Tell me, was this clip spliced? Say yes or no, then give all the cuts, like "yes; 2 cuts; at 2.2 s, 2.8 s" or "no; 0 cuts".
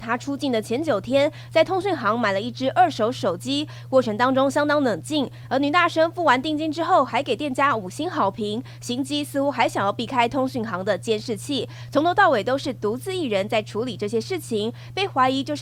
no; 0 cuts